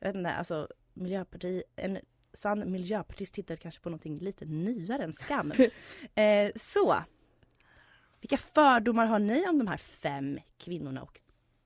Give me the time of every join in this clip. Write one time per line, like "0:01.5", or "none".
0:05.5